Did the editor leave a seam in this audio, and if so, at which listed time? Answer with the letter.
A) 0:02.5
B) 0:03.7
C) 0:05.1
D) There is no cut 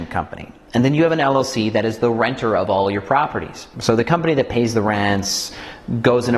B